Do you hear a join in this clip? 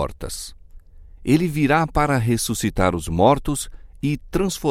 yes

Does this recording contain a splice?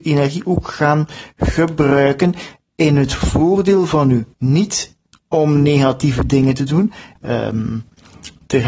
yes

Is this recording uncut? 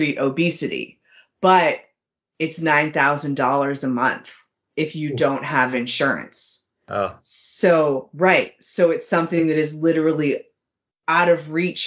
yes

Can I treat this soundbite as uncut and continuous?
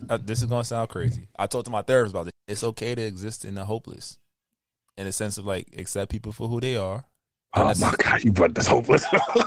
no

